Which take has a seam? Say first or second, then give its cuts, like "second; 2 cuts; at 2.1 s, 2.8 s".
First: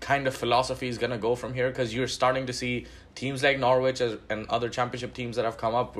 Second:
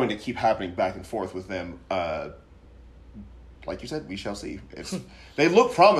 second; 1 cut; at 3.5 s